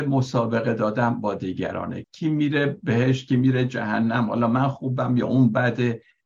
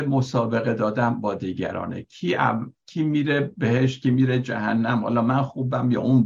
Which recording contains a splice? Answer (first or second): first